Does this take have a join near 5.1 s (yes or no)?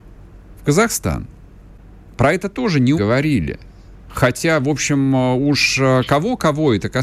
no